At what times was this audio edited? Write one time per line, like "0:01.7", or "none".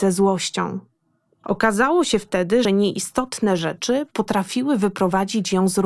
0:01.4
0:02.6